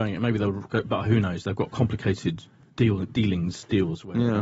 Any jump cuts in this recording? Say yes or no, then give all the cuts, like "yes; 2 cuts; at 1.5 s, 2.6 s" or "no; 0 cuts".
no; 0 cuts